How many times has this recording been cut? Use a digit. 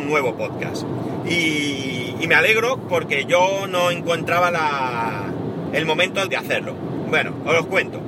2